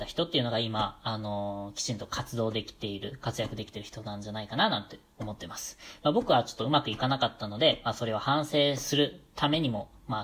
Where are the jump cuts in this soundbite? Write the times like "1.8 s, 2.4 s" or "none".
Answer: none